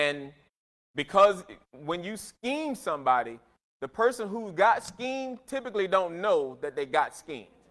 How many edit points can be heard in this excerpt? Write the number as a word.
zero